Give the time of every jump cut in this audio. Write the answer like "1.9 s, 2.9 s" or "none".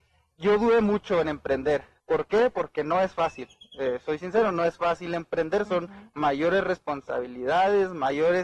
2.0 s